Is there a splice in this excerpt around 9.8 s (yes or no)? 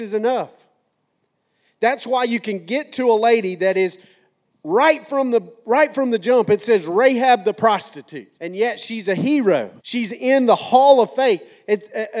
yes